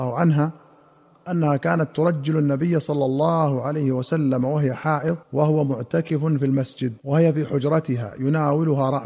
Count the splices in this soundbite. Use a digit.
2